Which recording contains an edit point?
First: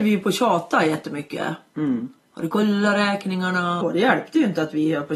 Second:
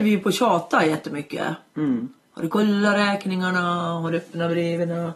first; 1 cut; at 3.8 s

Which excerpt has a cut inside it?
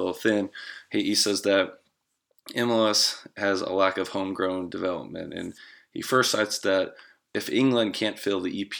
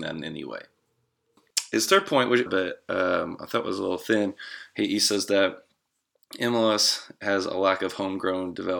second; 1 cut; at 2.5 s

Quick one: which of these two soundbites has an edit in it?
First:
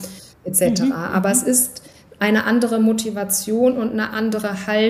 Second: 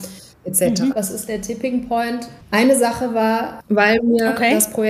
second; 3 cuts; at 0.9 s, 2.4 s, 3.6 s

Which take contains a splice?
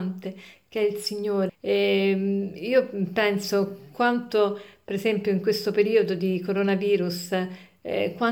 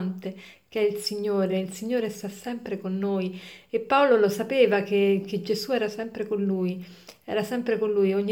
first; 1 cut; at 1.5 s

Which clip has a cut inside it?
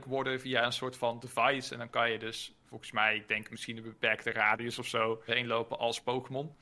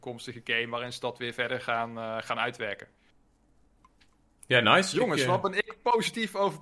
first; 1 cut; at 5.3 s

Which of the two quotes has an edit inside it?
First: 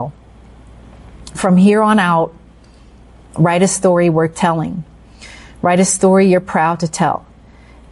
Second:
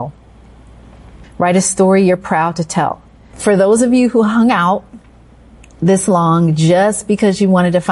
second; 2 cuts; at 1.2 s, 3.3 s

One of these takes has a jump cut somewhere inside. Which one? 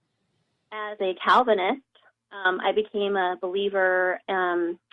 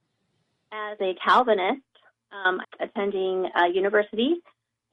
second; 1 cut; at 2.6 s

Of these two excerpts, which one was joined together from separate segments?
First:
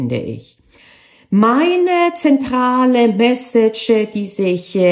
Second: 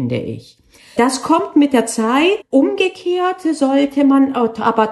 second; 2 cuts; at 1.0 s, 2.4 s

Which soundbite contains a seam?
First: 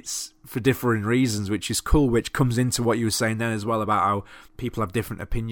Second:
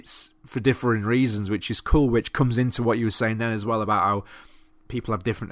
first; 1 cut; at 4.5 s

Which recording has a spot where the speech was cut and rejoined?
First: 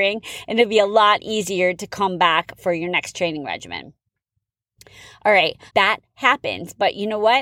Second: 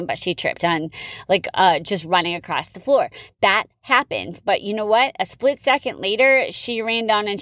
first; 1 cut; at 5.7 s

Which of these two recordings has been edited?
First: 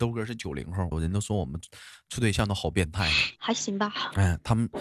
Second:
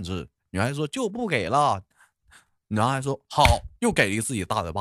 first; 2 cuts; at 0.9 s, 3.4 s

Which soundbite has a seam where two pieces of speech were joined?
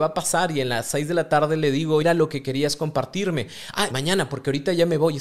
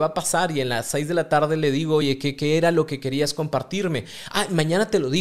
first; 2 cuts; at 2.0 s, 3.9 s

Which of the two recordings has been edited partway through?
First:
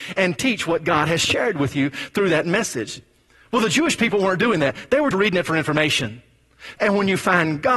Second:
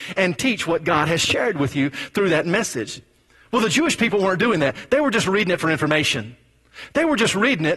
first; 2 cuts; at 5.1 s, 6.8 s

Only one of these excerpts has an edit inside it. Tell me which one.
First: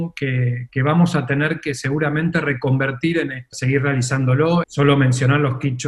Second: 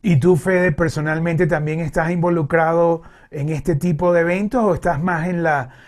first; 2 cuts; at 3.5 s, 4.6 s

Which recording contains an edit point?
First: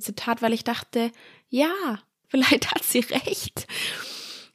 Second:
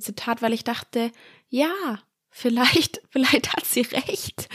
first; 1 cut; at 2.2 s

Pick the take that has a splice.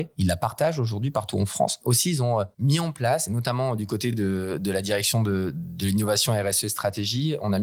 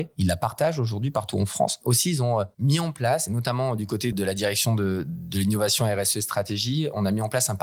second; 1 cut; at 4.1 s

